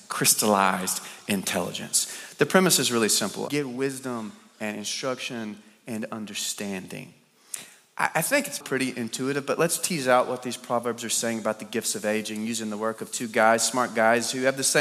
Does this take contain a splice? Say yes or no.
yes